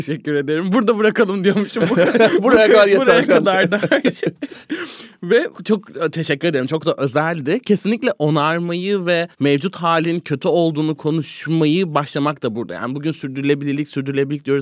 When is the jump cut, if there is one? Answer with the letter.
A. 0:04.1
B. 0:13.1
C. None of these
C